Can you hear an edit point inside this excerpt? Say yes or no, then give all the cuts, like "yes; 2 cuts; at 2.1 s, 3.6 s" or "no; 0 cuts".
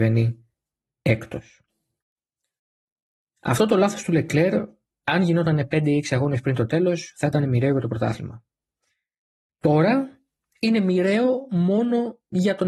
no; 0 cuts